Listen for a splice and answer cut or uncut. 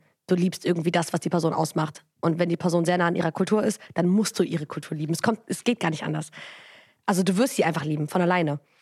uncut